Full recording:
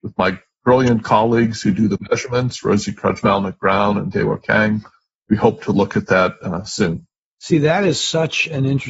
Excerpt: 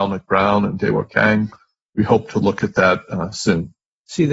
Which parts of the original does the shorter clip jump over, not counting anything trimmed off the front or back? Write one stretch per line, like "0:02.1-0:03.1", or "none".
none